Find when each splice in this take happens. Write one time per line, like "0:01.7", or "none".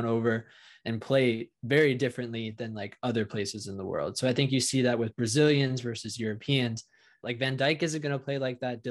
0:07.2